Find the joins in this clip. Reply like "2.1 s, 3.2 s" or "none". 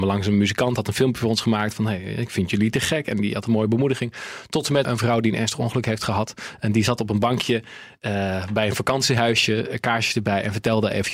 4.8 s